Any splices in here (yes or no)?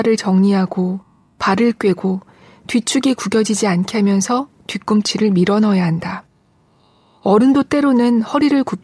no